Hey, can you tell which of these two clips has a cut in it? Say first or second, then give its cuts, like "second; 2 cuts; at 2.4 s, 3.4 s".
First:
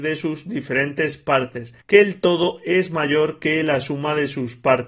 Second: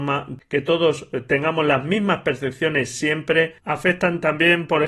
first; 1 cut; at 1.8 s